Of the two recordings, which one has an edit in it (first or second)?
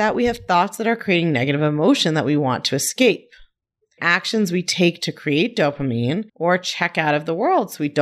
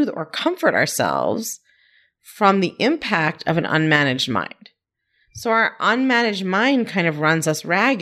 first